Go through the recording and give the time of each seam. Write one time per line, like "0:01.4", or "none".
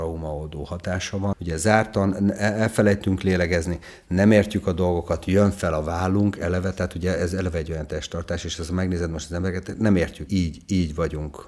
0:01.3
0:10.3

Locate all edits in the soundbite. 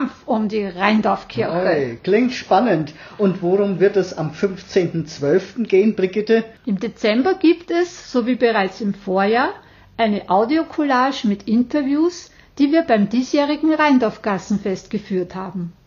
none

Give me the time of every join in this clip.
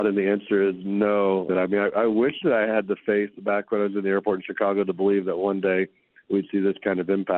0:01.5

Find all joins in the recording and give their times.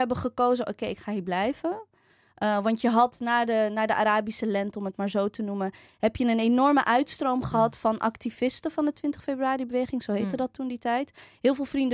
none

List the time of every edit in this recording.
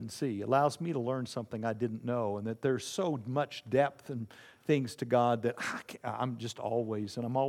none

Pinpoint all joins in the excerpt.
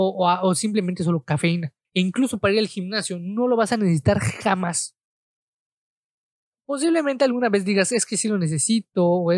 0:01.8

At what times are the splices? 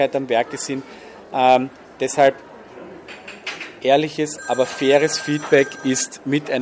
none

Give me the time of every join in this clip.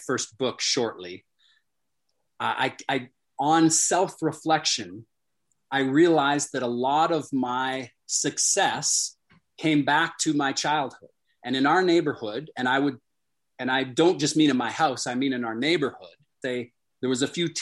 0:16.4

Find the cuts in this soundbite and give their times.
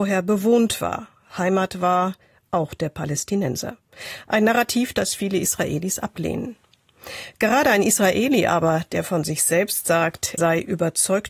0:10.4

